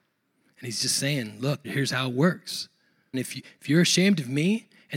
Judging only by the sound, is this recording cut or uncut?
cut